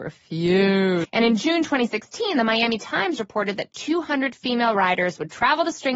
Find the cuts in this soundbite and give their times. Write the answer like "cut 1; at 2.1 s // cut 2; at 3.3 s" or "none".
cut 1; at 1.0 s